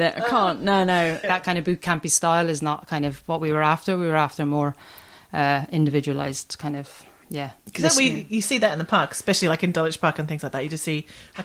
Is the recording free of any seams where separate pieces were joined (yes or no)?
no